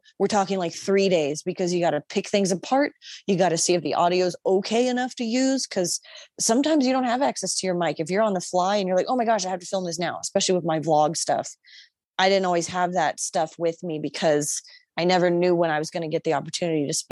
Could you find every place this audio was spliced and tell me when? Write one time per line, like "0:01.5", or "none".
none